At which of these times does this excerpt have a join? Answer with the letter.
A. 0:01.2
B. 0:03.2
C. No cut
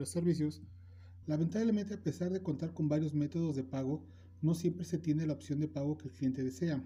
A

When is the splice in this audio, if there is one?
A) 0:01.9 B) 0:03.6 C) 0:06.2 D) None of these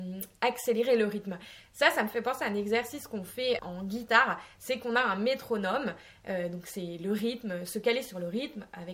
B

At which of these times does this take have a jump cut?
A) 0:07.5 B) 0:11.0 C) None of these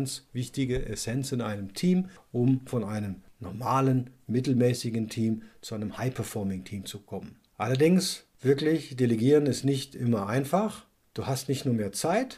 B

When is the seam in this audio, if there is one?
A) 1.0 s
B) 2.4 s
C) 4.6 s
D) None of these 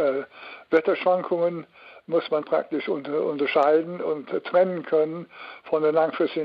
B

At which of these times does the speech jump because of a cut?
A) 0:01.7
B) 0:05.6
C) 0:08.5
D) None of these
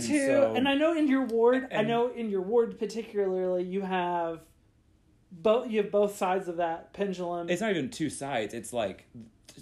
D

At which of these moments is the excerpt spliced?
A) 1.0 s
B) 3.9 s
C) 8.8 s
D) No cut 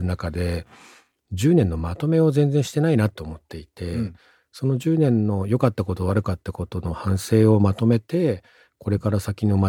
D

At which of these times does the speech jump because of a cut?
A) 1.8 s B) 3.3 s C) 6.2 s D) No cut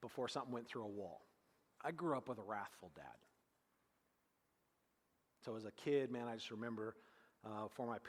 A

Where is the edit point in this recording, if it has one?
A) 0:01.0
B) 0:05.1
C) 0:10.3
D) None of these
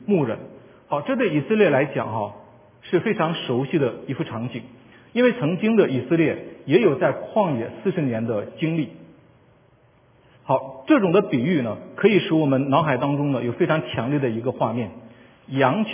C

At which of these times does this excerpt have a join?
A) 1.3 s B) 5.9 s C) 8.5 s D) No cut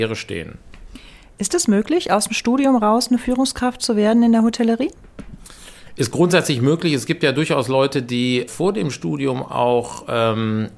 C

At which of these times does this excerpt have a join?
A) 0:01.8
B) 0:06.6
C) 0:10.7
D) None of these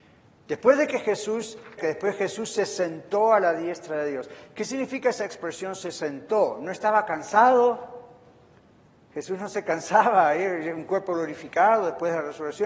A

